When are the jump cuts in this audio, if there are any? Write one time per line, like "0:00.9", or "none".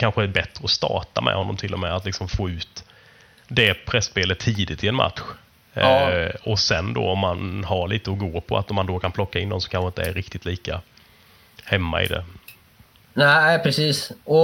none